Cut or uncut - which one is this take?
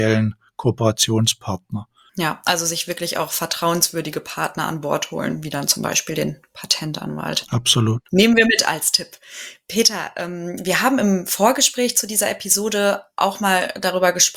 uncut